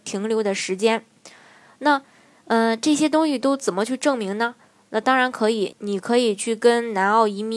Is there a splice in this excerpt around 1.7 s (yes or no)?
no